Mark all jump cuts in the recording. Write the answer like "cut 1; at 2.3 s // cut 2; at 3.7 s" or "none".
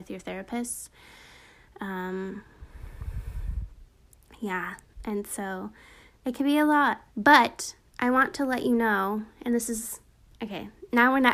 cut 1; at 7.1 s